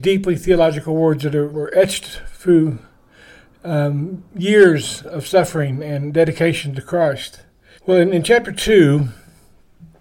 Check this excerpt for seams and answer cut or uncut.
cut